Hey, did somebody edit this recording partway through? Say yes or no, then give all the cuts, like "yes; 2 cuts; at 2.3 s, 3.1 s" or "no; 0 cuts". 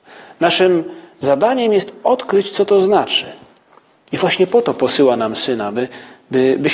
no; 0 cuts